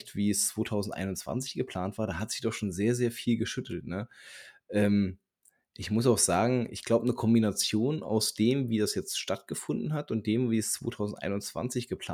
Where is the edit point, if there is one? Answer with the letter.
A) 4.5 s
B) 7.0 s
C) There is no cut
C